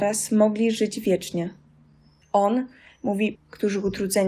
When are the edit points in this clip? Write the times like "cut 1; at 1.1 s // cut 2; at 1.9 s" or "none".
cut 1; at 2.2 s // cut 2; at 3.3 s